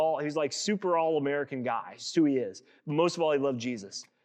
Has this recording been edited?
no; 0 cuts

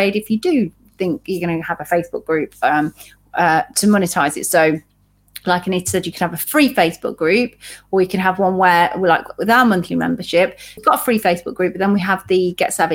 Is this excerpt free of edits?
yes; 0 cuts

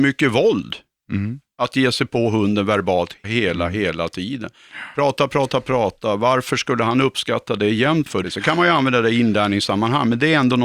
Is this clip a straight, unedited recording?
no; 2 cuts; at 3.2 s, 8.2 s

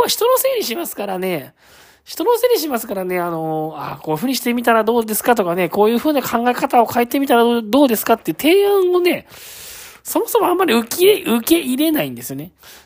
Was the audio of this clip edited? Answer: no; 0 cuts

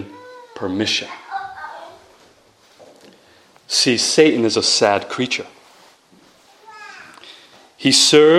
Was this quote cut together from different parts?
no; 0 cuts

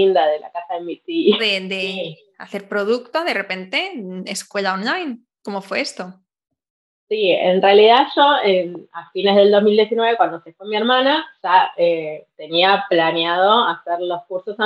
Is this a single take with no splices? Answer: no; 1 cut; at 1.4 s

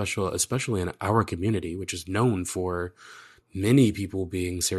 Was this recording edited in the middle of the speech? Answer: no; 0 cuts

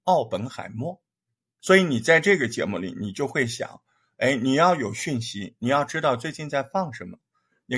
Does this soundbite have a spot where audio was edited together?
yes; 1 cut; at 1.6 s

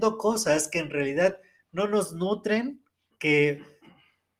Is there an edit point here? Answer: yes; 1 cut; at 3.1 s

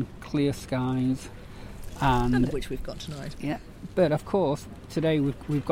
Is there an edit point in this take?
yes; 1 cut; at 3.3 s

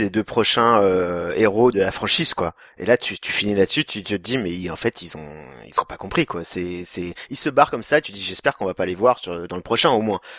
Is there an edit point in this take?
yes; 1 cut; at 1.7 s

